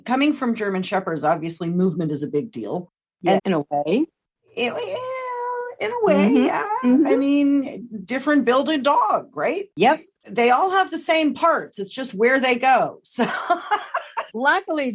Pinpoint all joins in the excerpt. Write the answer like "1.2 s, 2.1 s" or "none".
3.4 s